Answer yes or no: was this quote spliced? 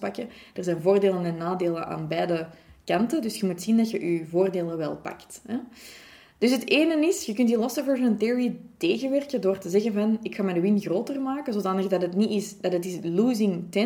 no